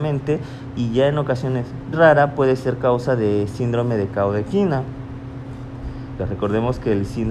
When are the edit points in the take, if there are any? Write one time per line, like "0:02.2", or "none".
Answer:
0:01.9
0:06.2